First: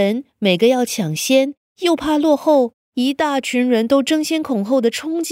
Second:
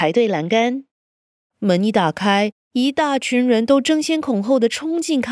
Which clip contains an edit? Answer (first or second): first